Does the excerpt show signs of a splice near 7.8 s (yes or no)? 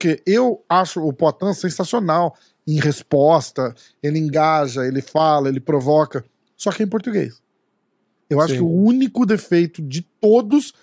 no